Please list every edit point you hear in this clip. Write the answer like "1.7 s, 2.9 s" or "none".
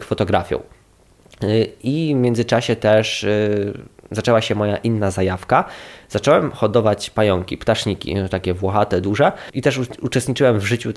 none

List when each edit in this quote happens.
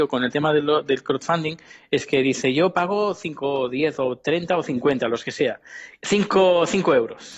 6.0 s

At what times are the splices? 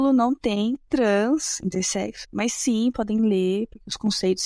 2.2 s

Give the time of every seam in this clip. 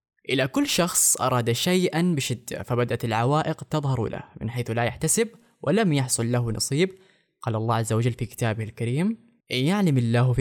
9.4 s

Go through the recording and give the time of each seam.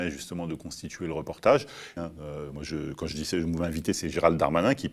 2.0 s

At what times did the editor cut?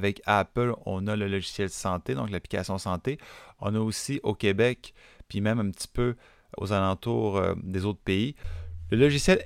6.6 s

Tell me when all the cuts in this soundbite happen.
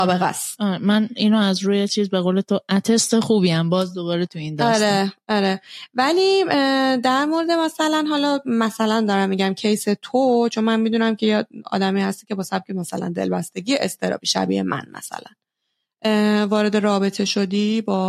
none

